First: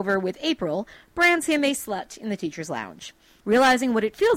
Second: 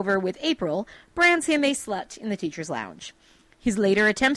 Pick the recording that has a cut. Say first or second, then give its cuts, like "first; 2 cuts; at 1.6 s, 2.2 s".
first; 1 cut; at 3.4 s